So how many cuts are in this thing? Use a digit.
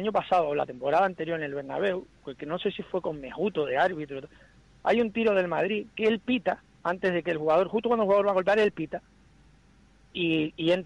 0